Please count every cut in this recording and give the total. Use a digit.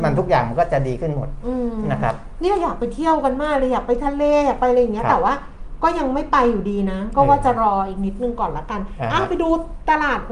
0